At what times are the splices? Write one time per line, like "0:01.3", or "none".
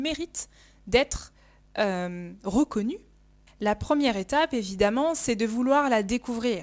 0:03.5